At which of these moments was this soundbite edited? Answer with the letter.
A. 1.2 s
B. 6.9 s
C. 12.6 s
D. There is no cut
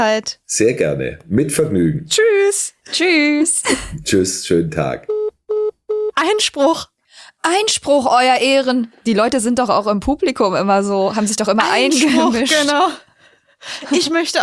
D